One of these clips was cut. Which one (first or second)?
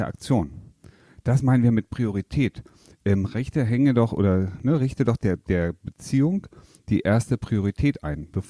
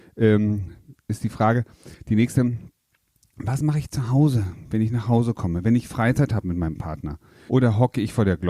second